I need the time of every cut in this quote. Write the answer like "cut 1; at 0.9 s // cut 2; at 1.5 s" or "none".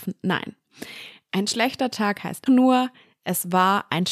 cut 1; at 2.5 s